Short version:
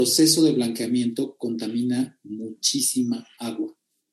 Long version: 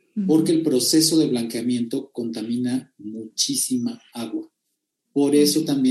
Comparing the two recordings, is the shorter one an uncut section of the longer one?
yes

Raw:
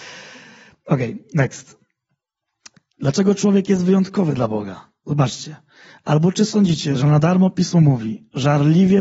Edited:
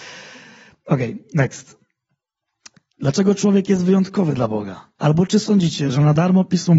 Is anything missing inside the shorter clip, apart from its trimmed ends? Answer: yes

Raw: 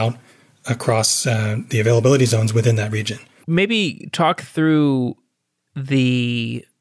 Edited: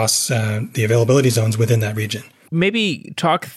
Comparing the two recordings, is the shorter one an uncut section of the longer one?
yes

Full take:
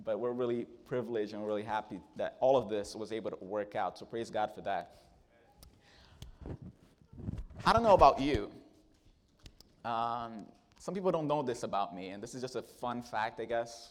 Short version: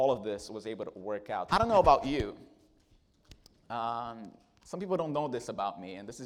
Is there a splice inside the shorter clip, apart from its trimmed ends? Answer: yes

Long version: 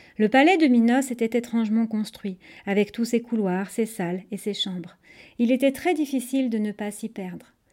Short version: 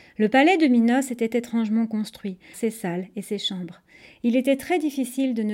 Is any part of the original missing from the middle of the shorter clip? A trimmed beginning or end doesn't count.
yes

